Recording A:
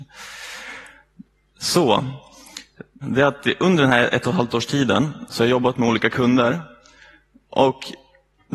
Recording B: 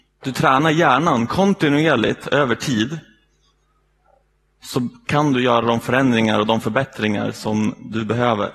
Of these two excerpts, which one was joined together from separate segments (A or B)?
A